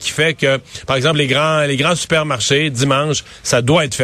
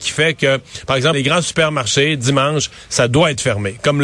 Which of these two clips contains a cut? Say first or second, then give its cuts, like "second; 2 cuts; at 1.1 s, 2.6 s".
second; 1 cut; at 1.1 s